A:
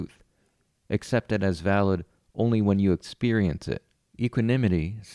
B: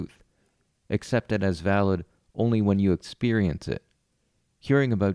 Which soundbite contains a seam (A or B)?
A